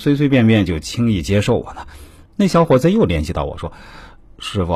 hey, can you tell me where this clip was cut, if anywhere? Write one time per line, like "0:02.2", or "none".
0:02.3